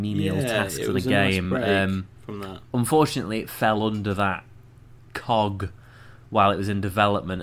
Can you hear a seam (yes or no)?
no